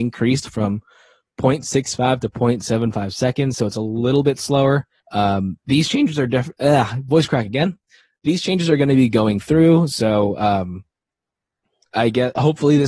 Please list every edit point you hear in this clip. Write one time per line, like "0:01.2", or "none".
0:05.0